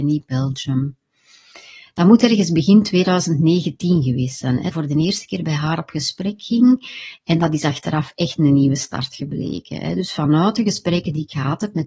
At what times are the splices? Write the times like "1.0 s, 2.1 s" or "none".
4.7 s